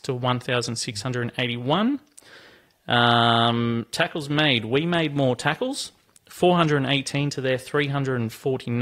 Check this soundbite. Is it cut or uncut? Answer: uncut